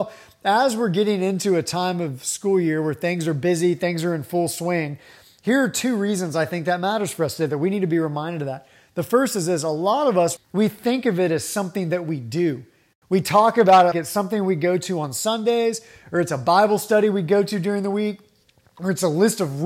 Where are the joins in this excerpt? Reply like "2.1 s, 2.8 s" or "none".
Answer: 10.4 s, 13.9 s